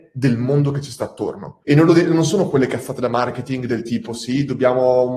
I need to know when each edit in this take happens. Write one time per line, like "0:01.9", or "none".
0:01.6

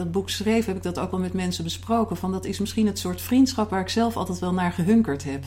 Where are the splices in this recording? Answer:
none

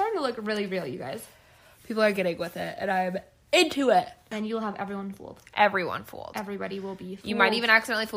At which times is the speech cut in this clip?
0:04.3

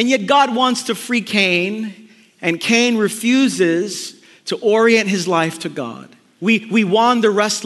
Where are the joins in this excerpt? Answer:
0:06.4

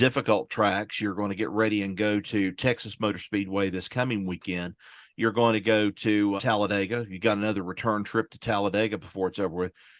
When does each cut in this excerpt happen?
0:06.4

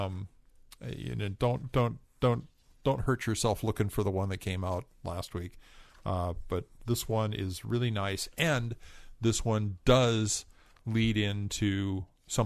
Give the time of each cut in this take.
none

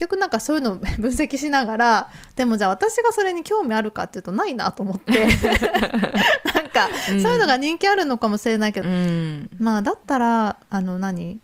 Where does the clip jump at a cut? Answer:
0:08.8

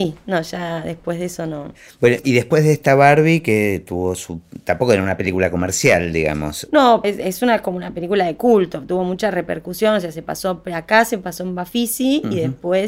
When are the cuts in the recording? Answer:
0:07.0

